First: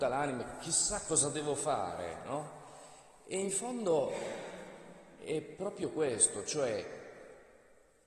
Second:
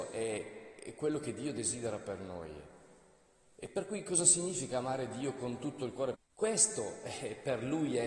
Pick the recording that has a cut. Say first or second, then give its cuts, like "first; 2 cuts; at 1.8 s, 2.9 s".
second; 1 cut; at 6.1 s